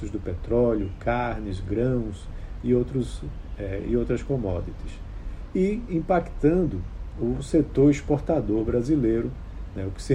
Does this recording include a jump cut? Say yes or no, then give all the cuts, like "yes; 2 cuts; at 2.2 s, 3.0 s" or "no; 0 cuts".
no; 0 cuts